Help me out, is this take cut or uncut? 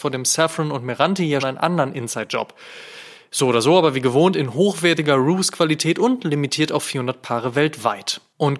cut